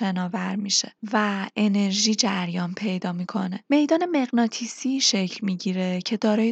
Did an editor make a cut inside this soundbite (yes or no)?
no